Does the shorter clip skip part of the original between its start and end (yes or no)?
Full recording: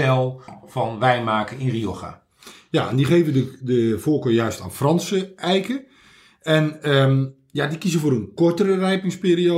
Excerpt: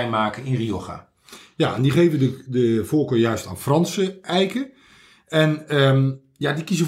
no